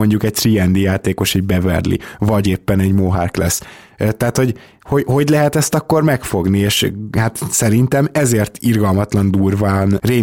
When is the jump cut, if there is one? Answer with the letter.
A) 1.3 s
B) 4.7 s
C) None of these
C